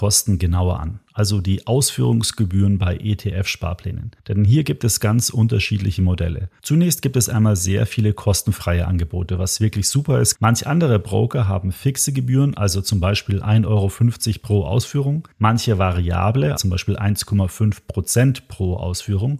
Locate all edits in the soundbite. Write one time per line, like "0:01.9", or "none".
0:10.3
0:16.6